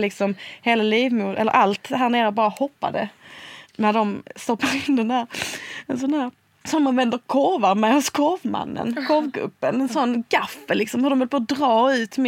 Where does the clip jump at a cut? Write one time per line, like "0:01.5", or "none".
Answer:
none